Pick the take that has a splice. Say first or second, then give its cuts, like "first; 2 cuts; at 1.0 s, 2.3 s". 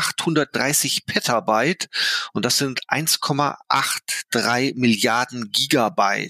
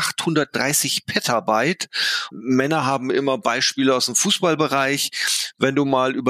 second; 1 cut; at 2.3 s